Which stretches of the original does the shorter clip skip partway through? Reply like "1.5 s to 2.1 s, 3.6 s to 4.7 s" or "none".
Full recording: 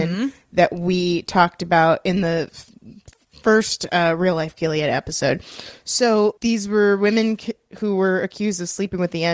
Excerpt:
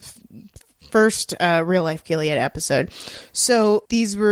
none